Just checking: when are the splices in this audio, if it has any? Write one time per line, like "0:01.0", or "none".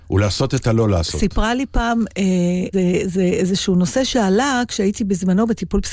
0:02.7